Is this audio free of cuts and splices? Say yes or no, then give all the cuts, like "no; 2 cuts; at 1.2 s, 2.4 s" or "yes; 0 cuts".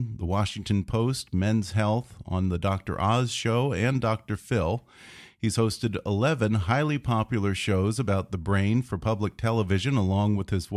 yes; 0 cuts